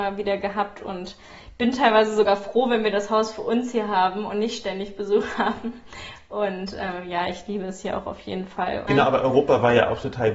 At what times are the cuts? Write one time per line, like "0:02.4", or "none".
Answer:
0:08.9